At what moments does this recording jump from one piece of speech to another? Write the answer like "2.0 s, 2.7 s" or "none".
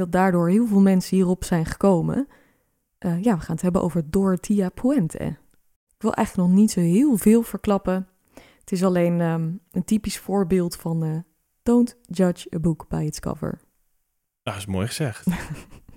none